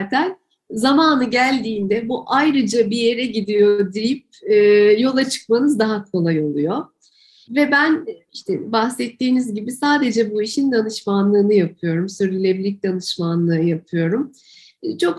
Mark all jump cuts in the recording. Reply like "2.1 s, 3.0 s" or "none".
none